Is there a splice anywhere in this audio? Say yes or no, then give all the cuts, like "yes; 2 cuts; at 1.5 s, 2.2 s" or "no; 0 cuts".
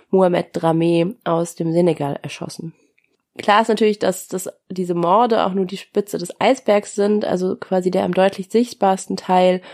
no; 0 cuts